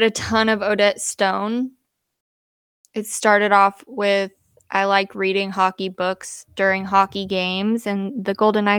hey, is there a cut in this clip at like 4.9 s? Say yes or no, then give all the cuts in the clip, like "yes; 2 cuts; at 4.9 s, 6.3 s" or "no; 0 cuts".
no; 1 cut; at 7.8 s